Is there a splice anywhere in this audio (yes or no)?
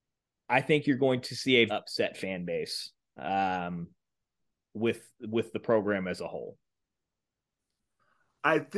yes